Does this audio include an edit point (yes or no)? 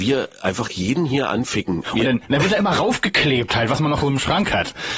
yes